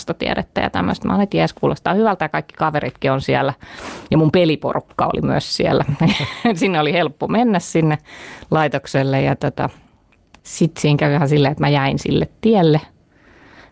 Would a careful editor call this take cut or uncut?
uncut